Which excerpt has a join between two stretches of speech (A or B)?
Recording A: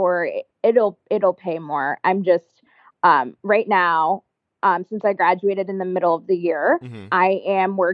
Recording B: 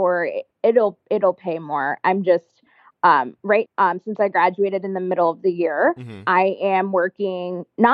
B